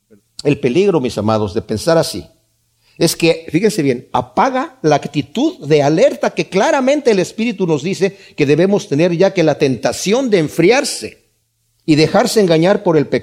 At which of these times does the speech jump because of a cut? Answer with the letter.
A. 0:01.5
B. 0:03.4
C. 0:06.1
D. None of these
D